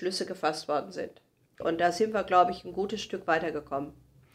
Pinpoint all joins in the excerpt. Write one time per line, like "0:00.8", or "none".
0:01.6